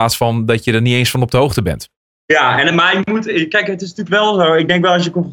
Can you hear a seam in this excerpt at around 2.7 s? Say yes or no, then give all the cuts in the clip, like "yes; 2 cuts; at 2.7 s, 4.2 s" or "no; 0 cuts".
no; 0 cuts